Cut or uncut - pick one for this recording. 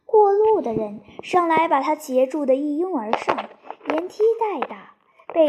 uncut